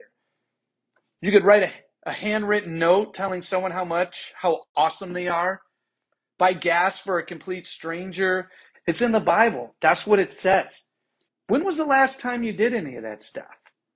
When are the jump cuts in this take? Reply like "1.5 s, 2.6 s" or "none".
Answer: 8.7 s, 11.3 s